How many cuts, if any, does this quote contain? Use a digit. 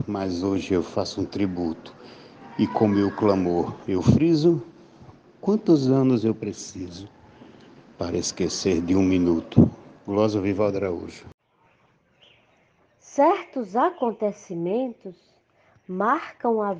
0